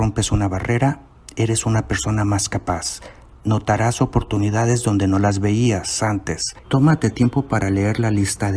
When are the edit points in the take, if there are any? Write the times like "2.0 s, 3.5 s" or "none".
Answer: 6.6 s

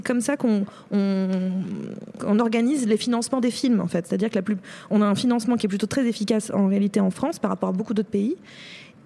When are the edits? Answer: 2.2 s

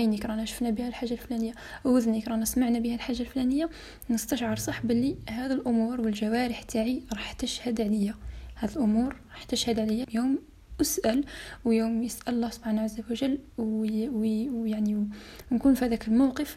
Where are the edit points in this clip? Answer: 10.0 s

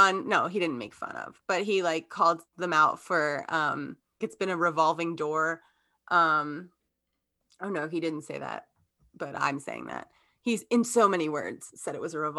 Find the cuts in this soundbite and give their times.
4.2 s

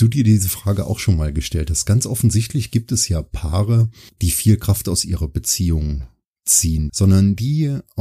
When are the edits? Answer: 6.9 s

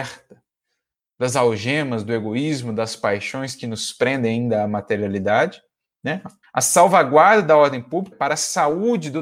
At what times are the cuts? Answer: 6.4 s, 8.1 s

